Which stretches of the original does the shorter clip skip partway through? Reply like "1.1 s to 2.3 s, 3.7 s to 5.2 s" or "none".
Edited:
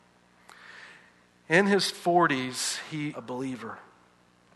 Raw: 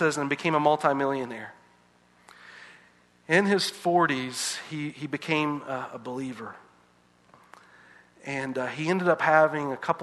4.9 s to 5.9 s